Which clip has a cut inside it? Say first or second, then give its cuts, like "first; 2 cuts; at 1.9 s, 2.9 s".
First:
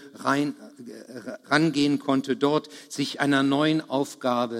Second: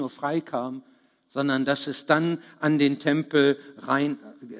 first; 1 cut; at 1.4 s